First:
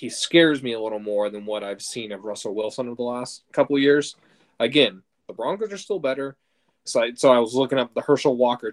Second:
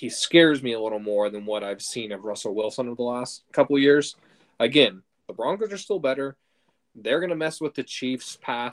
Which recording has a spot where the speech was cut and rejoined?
first; 1 cut; at 6.9 s

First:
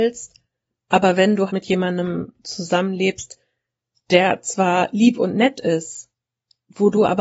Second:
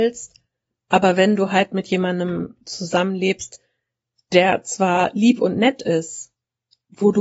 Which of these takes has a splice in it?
first; 1 cut; at 1.5 s

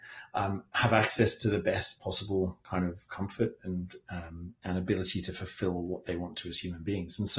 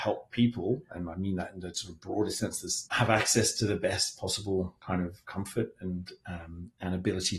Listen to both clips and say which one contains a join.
second; 1 cut; at 2.9 s

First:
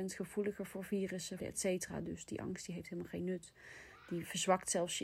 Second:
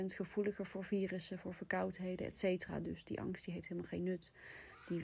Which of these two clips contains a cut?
first; 1 cut; at 1.4 s

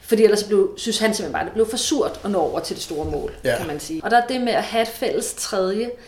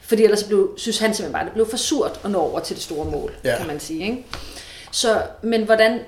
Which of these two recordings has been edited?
first; 1 cut; at 4.0 s

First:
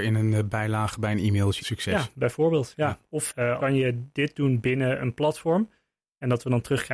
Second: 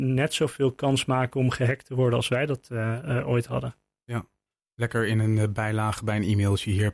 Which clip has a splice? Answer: first; 2 cuts; at 1.6 s, 3.6 s

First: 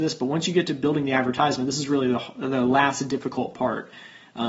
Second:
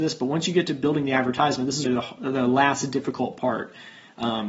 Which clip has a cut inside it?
second; 1 cut; at 1.9 s

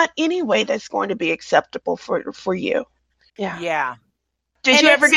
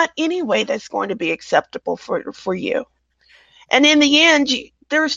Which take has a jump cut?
first; 1 cut; at 3.3 s

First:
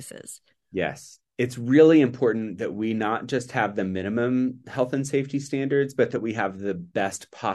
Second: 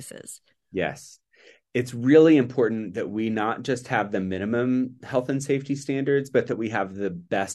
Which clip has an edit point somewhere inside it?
first; 1 cut; at 1.3 s

